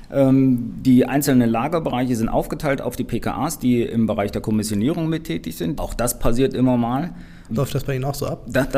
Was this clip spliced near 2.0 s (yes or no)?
no